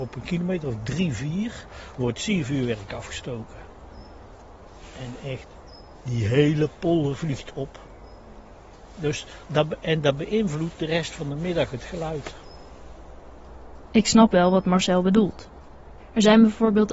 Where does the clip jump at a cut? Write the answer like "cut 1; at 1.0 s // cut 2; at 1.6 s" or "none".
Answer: none